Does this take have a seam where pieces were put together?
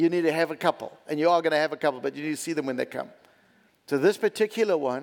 yes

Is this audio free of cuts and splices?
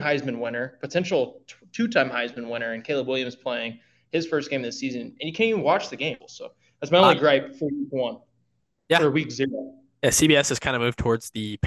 no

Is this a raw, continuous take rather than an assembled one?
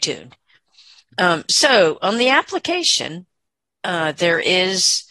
yes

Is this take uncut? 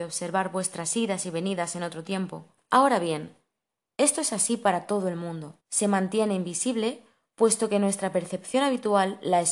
no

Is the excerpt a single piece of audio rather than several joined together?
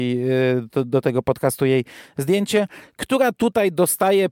yes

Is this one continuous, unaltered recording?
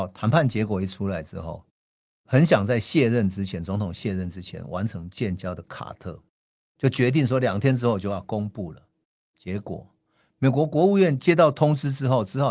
yes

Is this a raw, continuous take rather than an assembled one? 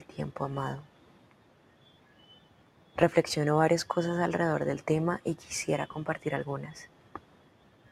yes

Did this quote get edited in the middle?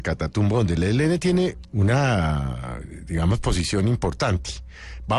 yes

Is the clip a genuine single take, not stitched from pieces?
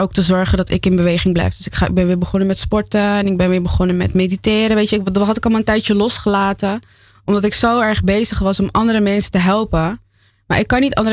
yes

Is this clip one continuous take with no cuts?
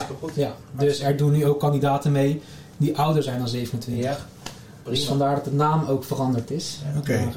yes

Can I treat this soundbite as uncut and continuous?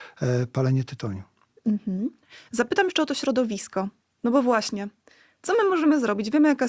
yes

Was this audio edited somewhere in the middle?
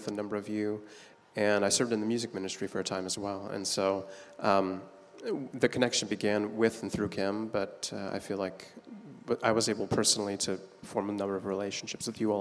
no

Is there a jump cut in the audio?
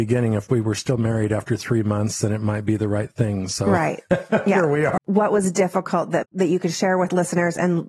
yes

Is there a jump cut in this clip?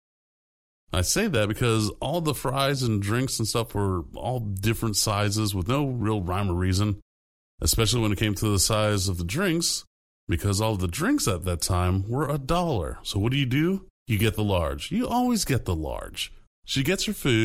yes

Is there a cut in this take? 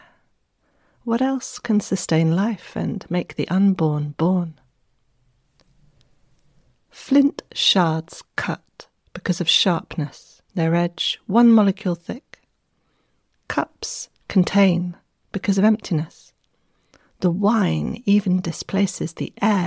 yes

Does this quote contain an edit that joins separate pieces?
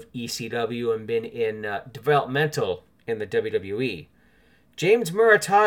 no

